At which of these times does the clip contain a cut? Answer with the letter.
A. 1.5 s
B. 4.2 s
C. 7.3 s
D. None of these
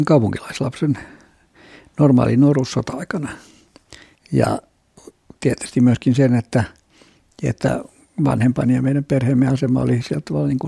B